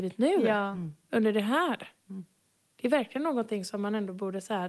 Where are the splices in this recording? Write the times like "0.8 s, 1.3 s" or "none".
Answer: none